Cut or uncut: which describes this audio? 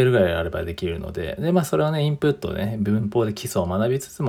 uncut